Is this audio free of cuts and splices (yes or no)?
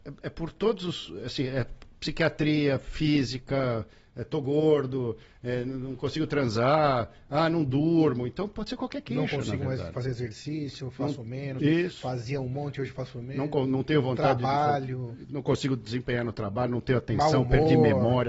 yes